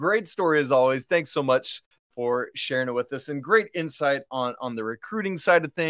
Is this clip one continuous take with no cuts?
yes; 0 cuts

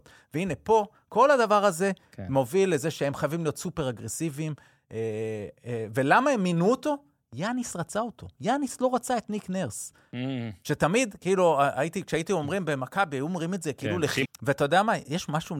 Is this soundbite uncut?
no; 2 cuts; at 10.1 s, 14.2 s

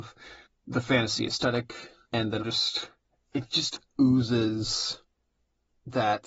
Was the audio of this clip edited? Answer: yes; 1 cut; at 2.4 s

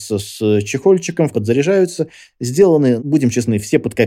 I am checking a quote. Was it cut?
yes; 2 cuts; at 1.3 s, 3.0 s

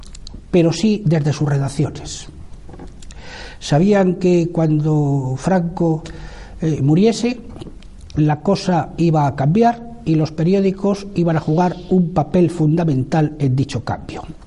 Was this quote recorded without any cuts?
yes; 0 cuts

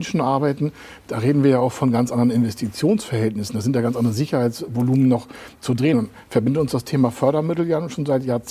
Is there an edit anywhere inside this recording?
no; 0 cuts

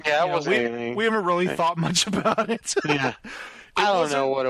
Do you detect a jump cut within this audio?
no; 0 cuts

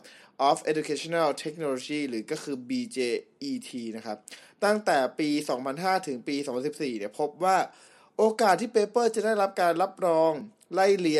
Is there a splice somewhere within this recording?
no; 0 cuts

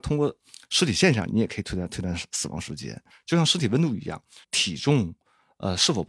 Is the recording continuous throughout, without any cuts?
no; 2 cuts; at 3.1 s, 4.4 s

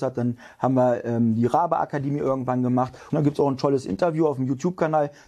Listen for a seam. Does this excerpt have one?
yes; 1 cut; at 3.1 s

